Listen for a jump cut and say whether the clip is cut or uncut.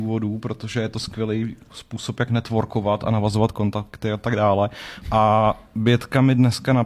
cut